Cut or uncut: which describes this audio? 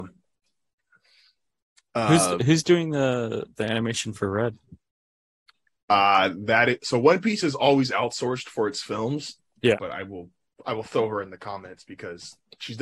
cut